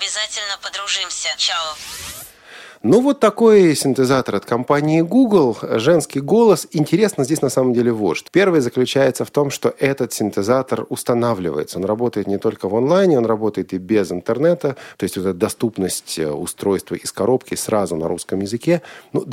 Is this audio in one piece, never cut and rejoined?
no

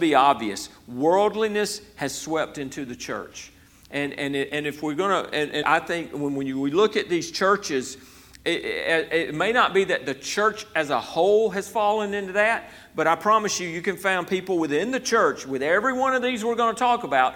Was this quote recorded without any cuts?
no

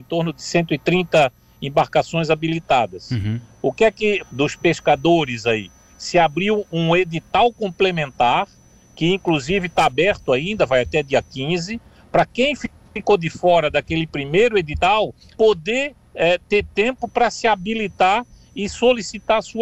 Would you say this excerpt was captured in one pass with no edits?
no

